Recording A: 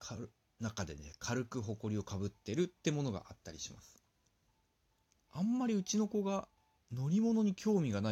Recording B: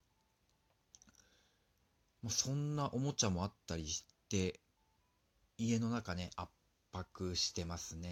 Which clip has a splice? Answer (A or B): A